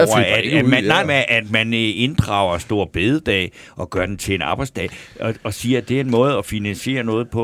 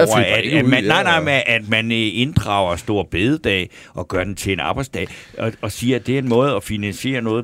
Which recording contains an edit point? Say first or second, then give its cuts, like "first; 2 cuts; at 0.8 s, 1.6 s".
first; 1 cut; at 1.0 s